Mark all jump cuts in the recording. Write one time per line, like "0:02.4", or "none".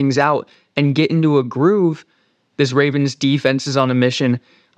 0:02.5